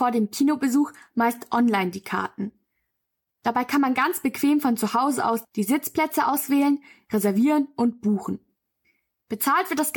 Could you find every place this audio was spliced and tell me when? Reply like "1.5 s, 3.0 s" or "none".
none